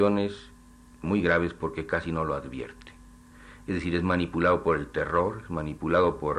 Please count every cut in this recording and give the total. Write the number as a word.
one